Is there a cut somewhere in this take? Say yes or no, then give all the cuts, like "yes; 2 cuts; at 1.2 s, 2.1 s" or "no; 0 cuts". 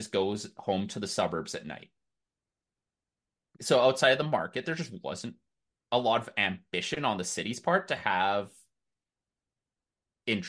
no; 0 cuts